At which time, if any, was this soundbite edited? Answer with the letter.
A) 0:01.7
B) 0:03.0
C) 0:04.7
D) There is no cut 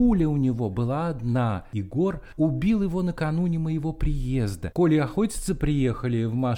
C